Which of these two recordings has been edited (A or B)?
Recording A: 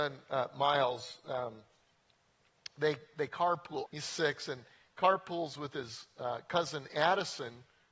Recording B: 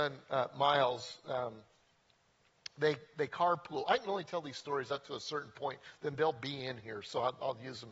A